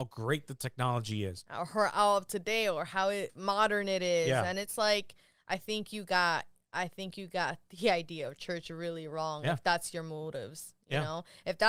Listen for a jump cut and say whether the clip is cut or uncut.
uncut